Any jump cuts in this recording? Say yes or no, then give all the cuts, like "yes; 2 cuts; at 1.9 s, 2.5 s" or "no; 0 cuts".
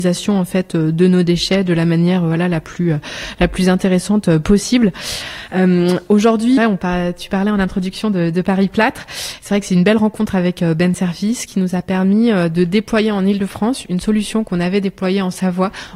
yes; 1 cut; at 6.6 s